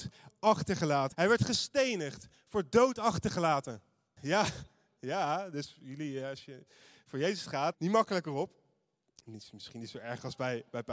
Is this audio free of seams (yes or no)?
no